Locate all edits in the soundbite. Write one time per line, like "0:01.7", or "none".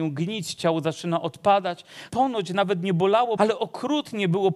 0:02.1
0:03.4